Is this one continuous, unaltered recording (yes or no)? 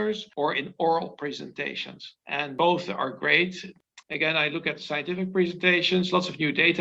no